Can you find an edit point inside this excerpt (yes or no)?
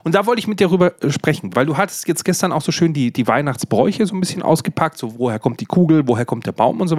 no